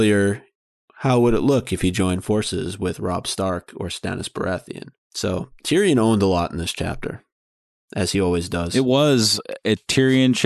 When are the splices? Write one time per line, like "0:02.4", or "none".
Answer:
none